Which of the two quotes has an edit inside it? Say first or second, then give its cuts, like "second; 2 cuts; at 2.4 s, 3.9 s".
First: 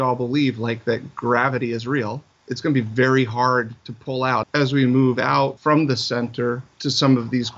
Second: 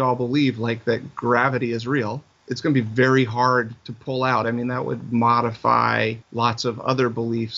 first; 1 cut; at 4.4 s